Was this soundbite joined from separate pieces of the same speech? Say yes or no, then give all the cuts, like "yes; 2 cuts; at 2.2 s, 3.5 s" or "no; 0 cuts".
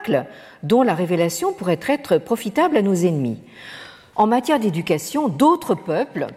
yes; 1 cut; at 4.1 s